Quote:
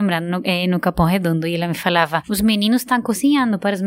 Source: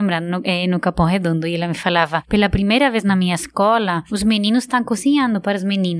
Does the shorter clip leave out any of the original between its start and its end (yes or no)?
yes